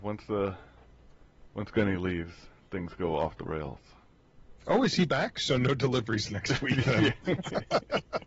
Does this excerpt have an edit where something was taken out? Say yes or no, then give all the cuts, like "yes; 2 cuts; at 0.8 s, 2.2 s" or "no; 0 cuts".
no; 0 cuts